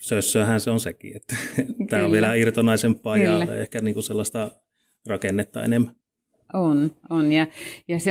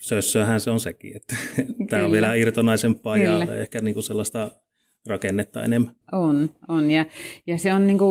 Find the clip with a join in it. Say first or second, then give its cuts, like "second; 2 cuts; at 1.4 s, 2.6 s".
second; 1 cut; at 6.0 s